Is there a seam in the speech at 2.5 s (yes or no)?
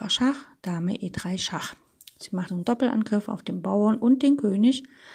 yes